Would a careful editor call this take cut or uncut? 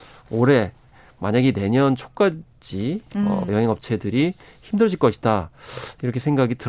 cut